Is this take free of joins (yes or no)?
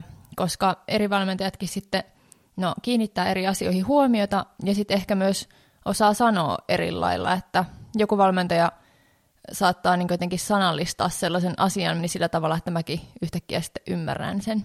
no